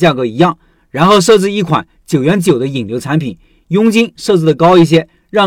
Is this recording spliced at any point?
no; 0 cuts

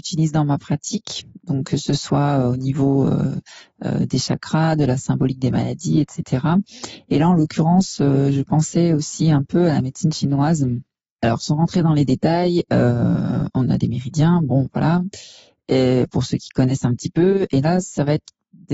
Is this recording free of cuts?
yes; 0 cuts

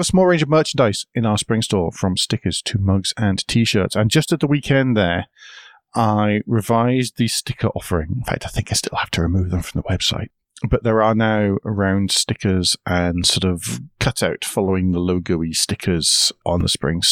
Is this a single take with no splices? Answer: yes; 0 cuts

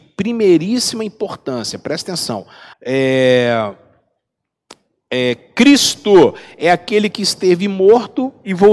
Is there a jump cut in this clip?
yes; 1 cut; at 2.7 s

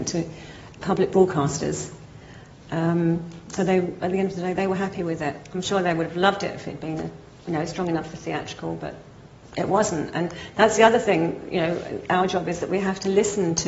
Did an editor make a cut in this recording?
yes; 1 cut; at 3.6 s

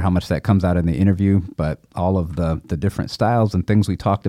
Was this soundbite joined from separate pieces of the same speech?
no; 0 cuts

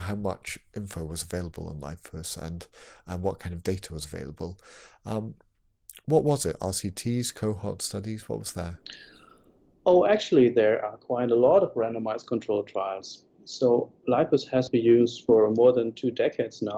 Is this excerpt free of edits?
yes; 0 cuts

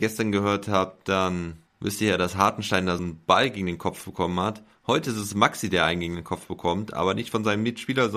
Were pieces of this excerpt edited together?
yes; 1 cut; at 3.0 s

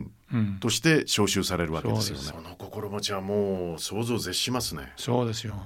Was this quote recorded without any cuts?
no; 1 cut; at 2.3 s

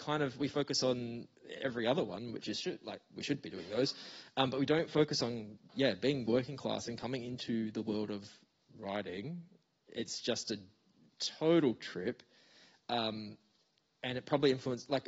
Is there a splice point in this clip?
no; 0 cuts

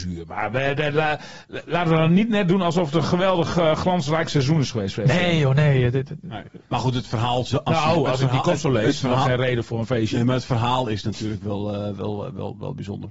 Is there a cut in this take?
yes; 1 cut; at 6.6 s

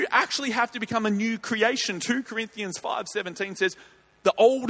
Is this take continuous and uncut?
yes; 0 cuts

